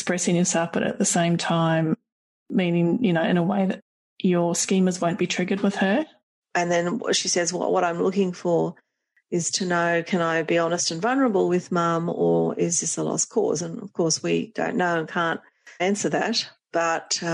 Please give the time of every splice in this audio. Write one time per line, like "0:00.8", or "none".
0:06.4